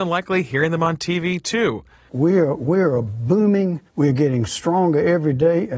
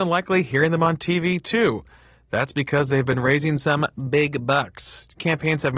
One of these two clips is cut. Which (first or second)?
first